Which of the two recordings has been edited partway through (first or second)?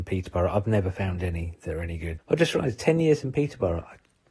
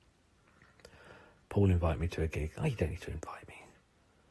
first